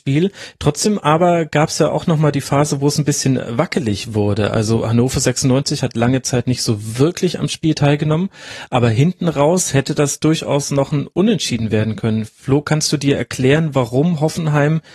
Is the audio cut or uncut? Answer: uncut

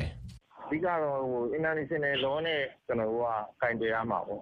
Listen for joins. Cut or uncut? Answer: cut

